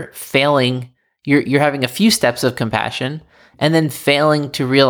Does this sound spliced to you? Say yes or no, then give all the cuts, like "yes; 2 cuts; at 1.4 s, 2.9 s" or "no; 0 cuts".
no; 0 cuts